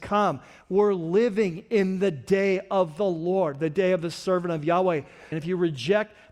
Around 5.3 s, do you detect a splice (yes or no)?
yes